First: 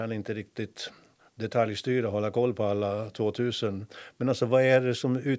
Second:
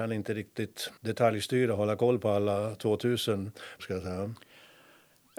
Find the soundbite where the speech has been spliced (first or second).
second